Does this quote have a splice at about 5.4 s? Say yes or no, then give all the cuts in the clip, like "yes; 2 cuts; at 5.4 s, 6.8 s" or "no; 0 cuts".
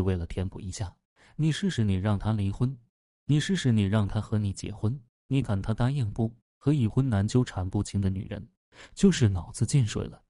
yes; 1 cut; at 5.4 s